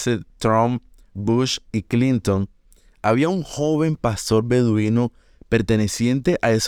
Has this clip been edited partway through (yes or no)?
no